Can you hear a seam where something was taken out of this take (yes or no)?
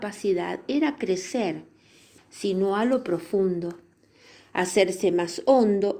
yes